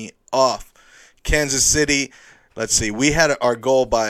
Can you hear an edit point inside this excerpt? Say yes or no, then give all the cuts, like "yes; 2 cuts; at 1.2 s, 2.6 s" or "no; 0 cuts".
no; 0 cuts